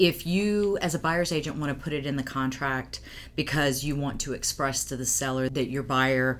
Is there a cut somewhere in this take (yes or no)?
no